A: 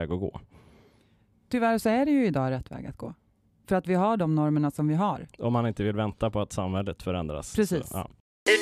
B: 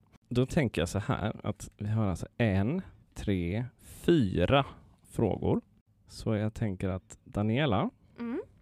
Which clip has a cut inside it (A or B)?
B